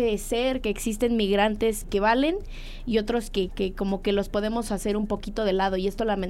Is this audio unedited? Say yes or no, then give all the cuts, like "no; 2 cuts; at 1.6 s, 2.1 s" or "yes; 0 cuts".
no; 2 cuts; at 1.8 s, 3.5 s